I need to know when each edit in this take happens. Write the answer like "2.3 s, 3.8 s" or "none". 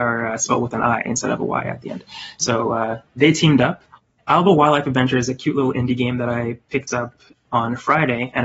none